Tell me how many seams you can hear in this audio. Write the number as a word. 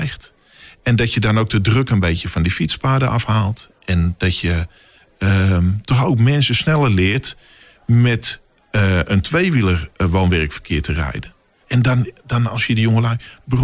one